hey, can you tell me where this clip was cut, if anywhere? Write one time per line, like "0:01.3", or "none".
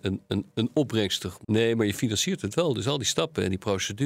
0:01.4